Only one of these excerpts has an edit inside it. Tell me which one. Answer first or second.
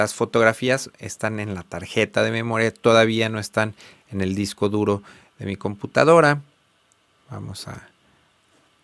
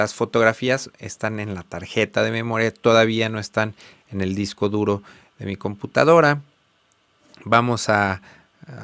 first